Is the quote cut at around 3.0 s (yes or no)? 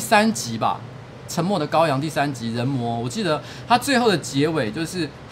no